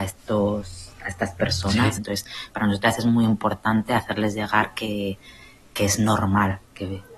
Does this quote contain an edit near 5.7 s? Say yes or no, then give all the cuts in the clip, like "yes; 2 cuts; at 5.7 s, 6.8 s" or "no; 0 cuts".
no; 1 cut; at 2.0 s